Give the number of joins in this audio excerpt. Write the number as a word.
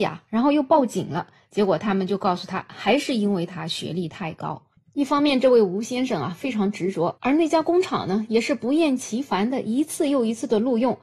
two